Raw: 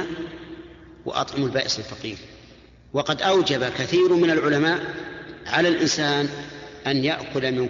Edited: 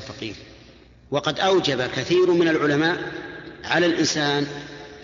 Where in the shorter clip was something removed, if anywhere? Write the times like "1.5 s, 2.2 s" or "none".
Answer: none